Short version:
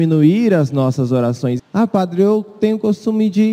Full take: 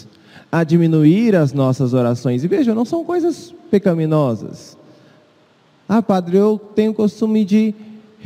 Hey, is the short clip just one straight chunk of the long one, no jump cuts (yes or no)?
no